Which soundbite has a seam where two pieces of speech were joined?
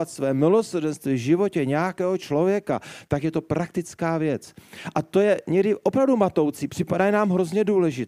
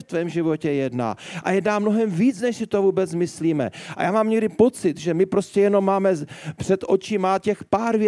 first; 1 cut; at 6.7 s

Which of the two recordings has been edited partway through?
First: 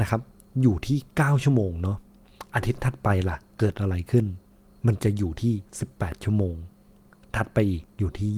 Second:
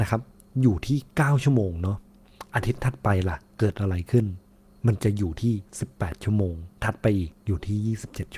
second; 1 cut; at 6.8 s

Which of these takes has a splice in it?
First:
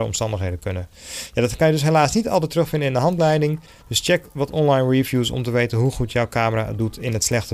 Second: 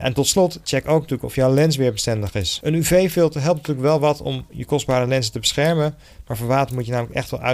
second; 1 cut; at 2.6 s

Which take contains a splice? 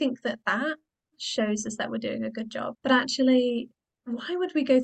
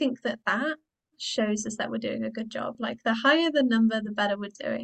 first; 1 cut; at 2.7 s

